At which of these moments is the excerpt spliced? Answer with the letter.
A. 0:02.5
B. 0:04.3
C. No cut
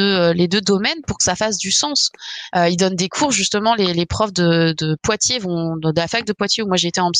A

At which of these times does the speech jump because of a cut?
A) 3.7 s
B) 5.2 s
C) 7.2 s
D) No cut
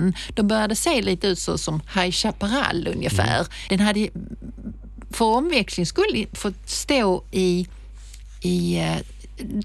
A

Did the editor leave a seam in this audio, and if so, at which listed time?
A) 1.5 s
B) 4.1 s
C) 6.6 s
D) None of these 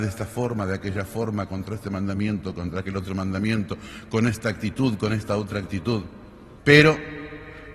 C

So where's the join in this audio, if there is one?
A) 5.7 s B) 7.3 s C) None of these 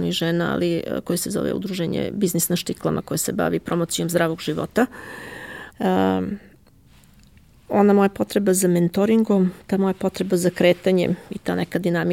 A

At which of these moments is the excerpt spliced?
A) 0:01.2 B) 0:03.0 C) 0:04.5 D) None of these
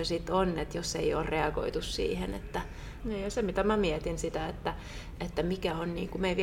B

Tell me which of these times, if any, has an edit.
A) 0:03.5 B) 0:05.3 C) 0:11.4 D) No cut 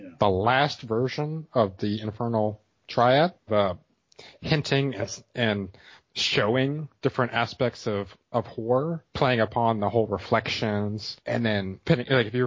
A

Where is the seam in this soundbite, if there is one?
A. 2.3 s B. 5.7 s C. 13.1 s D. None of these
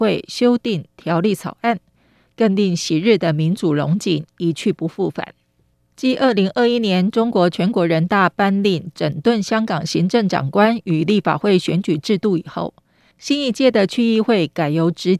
C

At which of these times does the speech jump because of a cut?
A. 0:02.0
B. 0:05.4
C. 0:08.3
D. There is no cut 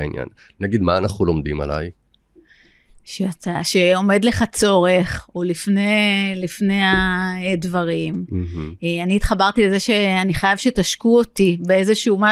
D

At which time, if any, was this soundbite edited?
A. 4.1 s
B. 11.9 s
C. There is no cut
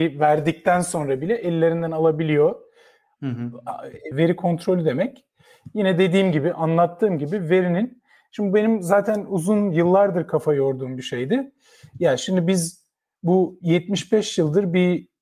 A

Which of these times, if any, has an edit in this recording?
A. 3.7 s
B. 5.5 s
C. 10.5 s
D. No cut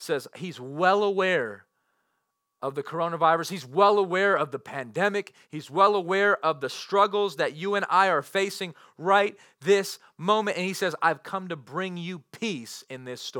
D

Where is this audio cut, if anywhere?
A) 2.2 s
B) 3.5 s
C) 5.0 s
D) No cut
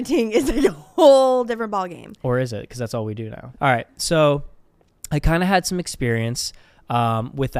B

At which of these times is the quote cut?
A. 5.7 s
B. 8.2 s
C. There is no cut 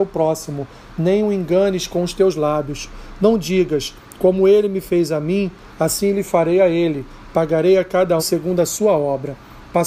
B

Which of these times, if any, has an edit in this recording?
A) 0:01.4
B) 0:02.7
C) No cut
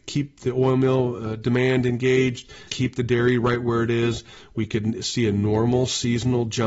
B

